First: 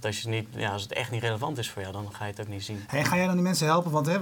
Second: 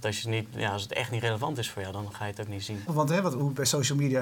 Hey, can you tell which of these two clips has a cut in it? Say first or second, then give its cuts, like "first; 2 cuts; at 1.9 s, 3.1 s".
second; 1 cut; at 2.9 s